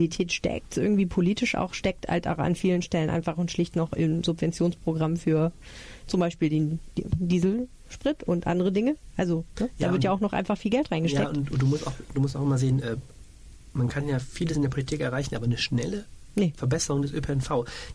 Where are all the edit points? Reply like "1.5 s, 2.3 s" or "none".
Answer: none